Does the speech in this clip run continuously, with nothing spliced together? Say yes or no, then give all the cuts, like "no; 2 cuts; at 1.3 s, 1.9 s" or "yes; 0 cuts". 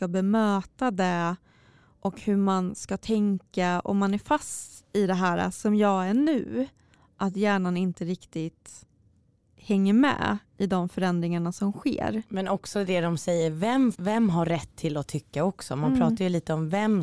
no; 1 cut; at 13.9 s